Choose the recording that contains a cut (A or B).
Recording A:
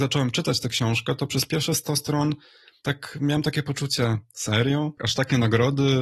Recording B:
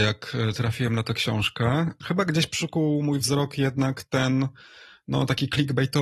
A